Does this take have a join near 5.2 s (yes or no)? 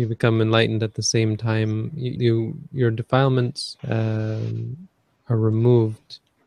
no